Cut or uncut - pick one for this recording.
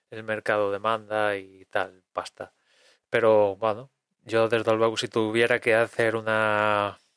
uncut